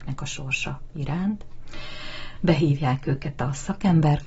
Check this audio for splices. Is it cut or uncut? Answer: cut